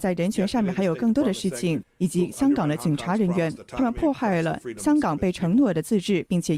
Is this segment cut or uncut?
cut